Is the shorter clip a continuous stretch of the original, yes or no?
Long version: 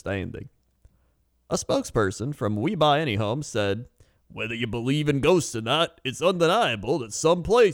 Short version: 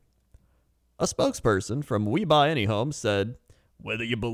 yes